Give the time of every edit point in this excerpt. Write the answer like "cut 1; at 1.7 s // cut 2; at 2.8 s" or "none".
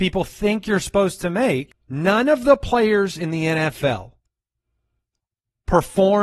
cut 1; at 1.7 s